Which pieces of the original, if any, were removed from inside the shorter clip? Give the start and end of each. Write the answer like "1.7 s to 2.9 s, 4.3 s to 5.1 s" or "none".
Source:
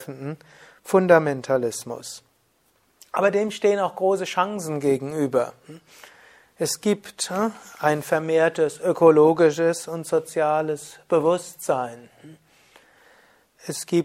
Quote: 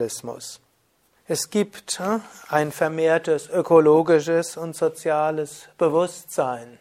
2.8 s to 6.5 s